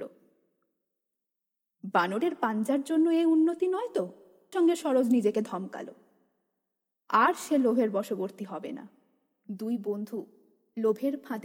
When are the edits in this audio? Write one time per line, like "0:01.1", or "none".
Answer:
0:04.5